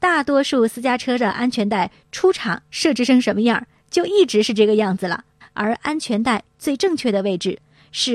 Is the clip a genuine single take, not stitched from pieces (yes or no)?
no